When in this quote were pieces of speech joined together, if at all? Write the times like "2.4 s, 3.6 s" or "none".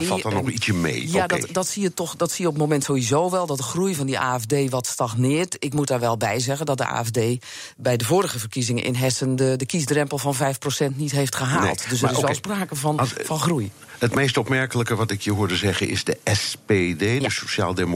none